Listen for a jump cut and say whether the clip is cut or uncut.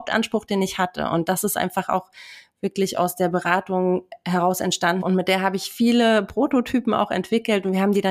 cut